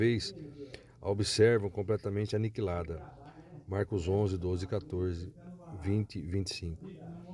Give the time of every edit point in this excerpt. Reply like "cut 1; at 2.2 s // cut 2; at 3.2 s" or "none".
none